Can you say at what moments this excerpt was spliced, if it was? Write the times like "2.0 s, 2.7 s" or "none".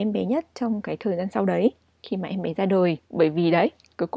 3.0 s

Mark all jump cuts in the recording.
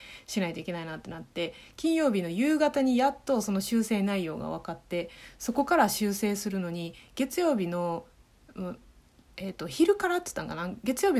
none

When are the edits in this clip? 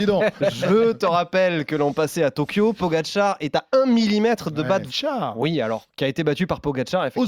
4.9 s

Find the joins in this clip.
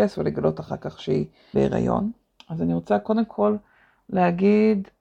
1.5 s

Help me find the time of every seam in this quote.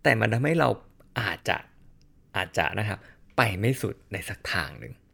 1.4 s

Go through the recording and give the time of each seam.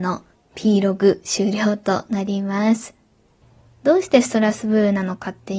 3.7 s

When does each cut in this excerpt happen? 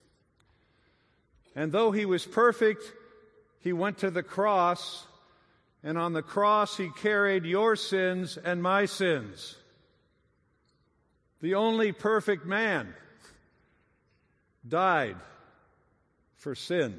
none

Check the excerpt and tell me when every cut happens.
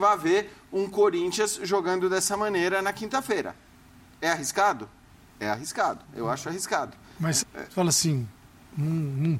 7.4 s

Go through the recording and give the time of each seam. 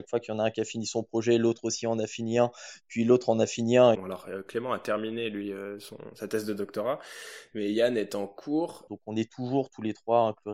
3.9 s, 8.9 s

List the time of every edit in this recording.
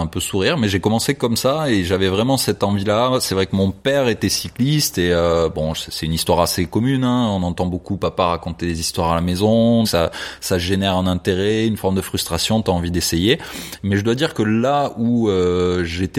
9.8 s

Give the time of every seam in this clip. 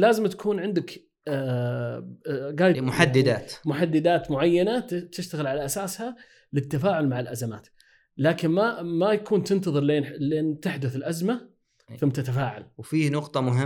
2.7 s

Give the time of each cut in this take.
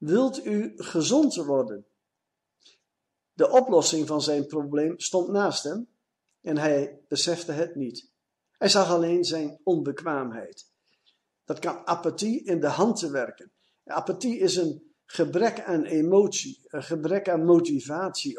11.4 s

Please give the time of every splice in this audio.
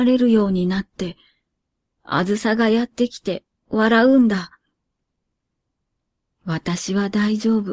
1.8 s

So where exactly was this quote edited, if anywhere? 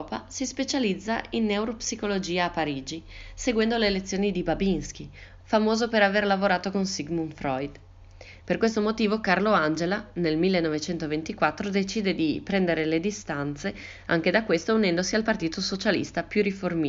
5.4 s, 8.4 s

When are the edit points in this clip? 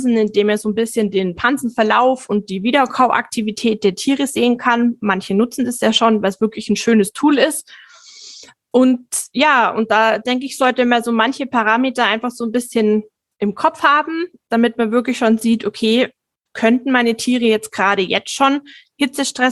none

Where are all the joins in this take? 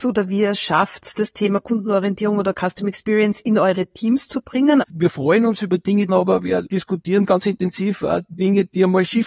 4.8 s, 6.1 s

